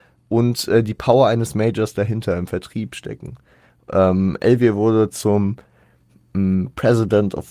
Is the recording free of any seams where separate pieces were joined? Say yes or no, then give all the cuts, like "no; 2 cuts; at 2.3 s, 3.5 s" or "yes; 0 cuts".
yes; 0 cuts